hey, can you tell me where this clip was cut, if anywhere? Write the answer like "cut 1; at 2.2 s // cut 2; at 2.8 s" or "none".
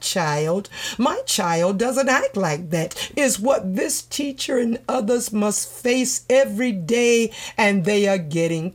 none